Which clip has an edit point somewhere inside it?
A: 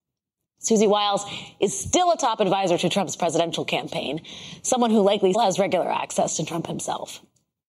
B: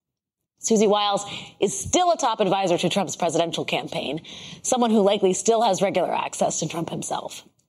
A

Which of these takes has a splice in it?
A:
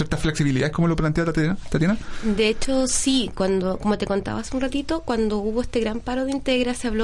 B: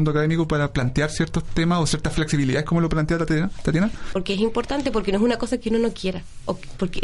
B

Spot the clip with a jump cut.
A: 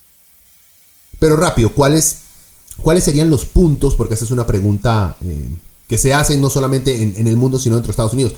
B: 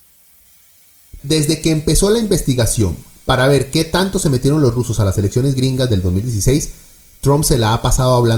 B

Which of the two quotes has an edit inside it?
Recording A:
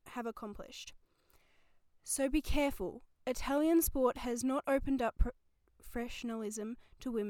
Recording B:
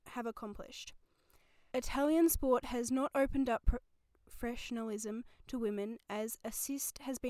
B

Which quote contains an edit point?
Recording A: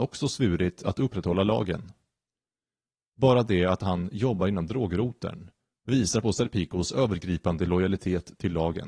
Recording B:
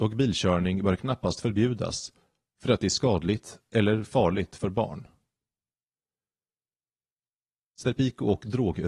A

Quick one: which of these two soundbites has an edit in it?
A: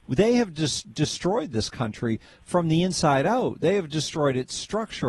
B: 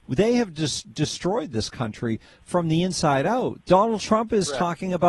B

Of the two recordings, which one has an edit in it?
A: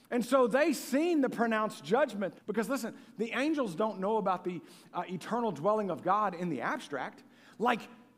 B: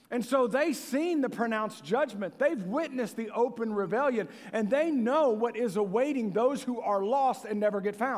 A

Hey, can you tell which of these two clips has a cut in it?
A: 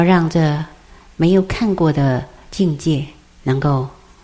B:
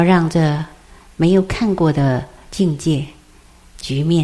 A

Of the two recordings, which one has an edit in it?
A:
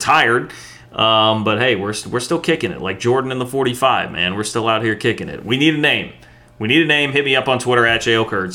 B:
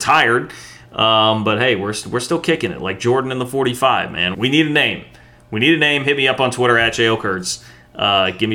B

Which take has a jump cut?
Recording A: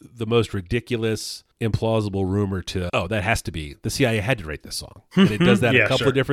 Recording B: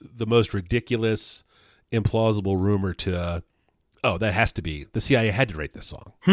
A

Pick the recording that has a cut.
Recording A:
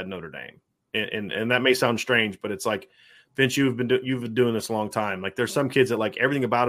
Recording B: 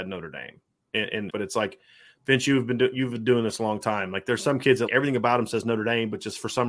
B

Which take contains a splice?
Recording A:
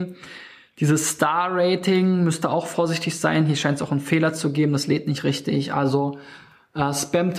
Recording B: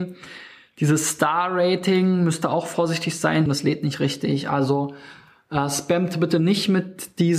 B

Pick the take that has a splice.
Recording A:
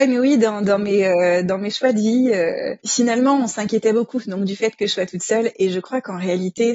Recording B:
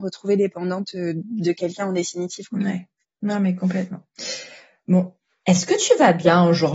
A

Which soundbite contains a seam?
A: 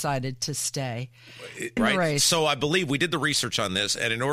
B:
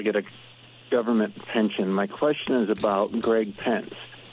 A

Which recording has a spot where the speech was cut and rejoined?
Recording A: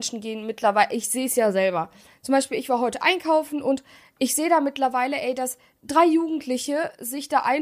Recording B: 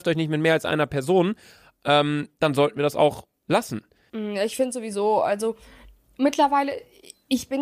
B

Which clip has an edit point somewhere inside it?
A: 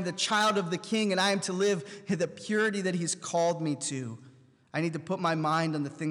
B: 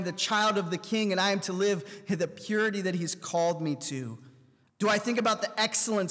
B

